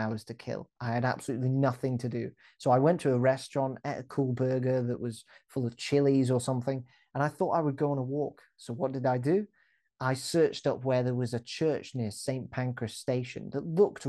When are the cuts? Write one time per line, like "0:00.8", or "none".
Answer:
none